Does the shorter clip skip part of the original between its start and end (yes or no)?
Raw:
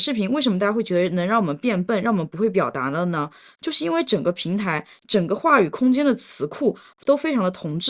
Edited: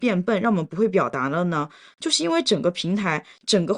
no